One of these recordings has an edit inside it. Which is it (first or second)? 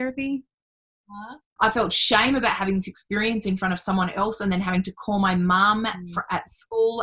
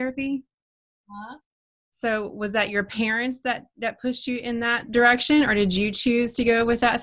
first